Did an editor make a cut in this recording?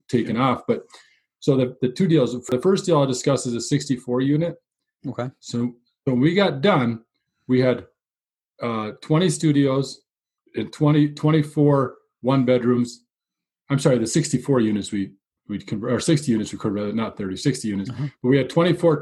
yes; 1 cut; at 5.0 s

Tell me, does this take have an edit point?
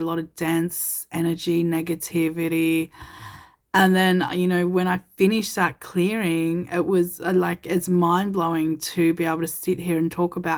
no; 0 cuts

